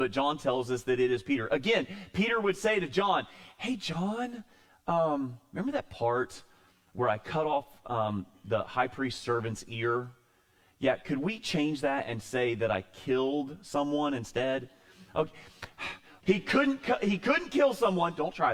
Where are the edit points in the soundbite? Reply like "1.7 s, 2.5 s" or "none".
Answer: 16.2 s